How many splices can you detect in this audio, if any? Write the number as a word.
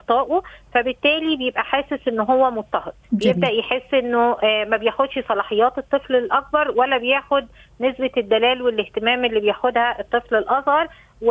one